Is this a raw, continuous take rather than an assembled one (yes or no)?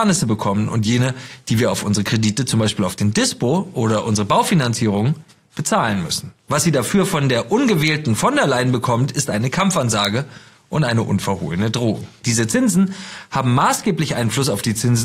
no